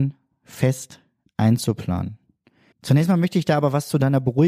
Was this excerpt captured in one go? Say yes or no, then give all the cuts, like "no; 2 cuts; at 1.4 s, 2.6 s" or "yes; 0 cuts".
no; 1 cut; at 2.7 s